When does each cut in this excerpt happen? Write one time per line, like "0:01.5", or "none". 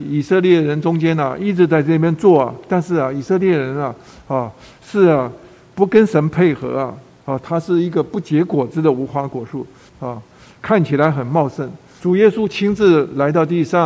0:09.9
0:12.0